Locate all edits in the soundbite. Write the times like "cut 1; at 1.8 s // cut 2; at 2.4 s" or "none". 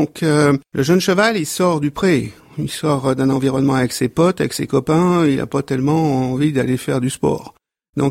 none